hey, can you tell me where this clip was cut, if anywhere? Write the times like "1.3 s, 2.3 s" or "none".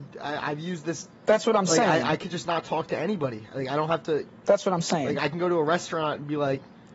none